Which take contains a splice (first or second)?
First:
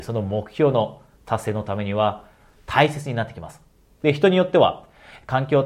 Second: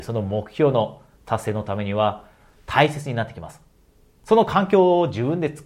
first